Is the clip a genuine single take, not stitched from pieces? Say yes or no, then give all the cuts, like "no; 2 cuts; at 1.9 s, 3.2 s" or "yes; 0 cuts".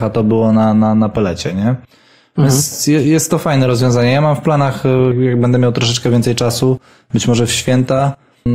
no; 1 cut; at 5.1 s